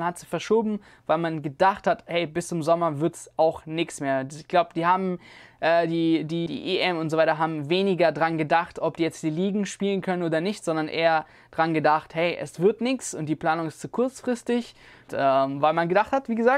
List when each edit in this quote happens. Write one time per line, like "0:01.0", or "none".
0:06.5
0:15.1